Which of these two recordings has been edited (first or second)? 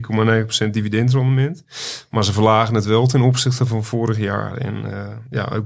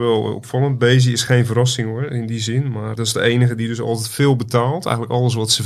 second